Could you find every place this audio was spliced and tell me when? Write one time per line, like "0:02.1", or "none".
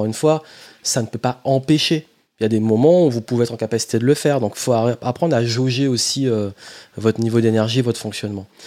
none